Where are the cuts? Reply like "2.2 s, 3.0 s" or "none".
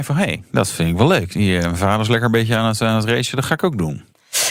none